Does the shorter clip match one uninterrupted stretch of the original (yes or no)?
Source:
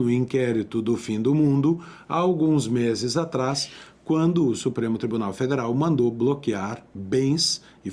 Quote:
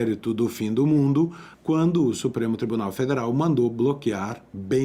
no